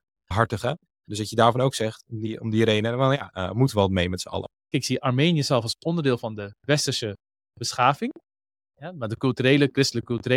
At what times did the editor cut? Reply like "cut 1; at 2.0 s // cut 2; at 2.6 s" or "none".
cut 1; at 3.3 s // cut 2; at 4.7 s